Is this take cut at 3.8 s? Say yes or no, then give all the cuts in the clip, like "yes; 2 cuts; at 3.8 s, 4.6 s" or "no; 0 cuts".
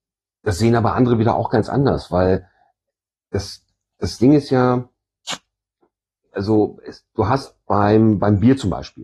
no; 1 cut; at 6.2 s